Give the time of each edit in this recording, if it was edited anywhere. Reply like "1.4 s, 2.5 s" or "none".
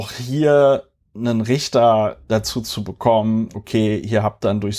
3.5 s